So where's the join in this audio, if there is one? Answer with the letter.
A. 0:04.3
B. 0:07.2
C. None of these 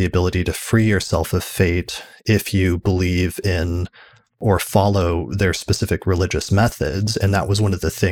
C